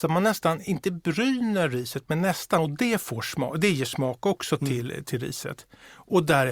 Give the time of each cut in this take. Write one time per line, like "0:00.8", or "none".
none